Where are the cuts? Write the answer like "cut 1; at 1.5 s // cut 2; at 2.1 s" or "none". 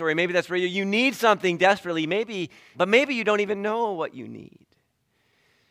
cut 1; at 2.7 s